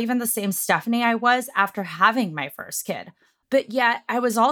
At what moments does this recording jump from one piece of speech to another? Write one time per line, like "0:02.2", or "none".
0:03.4